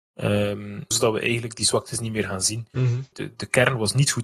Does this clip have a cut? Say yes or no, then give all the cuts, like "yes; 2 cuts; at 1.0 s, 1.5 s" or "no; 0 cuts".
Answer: yes; 2 cuts; at 0.9 s, 3.1 s